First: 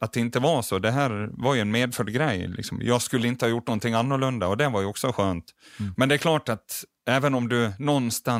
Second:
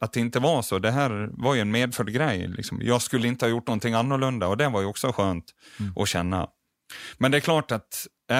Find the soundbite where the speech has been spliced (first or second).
first